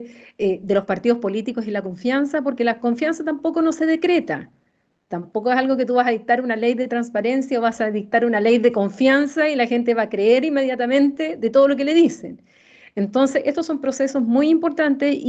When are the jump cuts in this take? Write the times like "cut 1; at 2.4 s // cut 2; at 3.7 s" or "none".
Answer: cut 1; at 5.0 s